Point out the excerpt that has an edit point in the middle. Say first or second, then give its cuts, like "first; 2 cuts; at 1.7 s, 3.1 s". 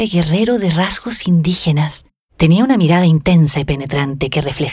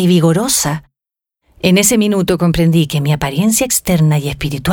first; 1 cut; at 2.2 s